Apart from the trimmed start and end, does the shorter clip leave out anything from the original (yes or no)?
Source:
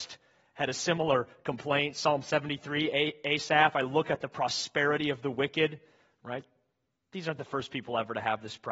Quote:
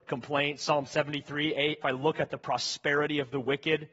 yes